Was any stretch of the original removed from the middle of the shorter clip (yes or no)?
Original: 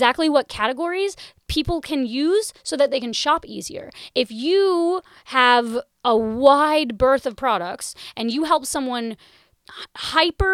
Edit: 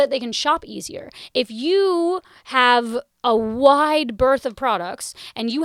no